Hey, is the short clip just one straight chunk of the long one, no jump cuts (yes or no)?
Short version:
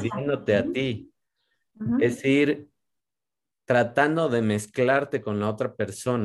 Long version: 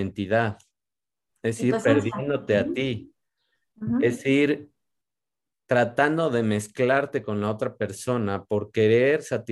yes